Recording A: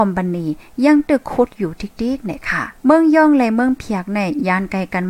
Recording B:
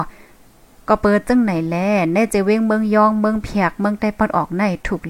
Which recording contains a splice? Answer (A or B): A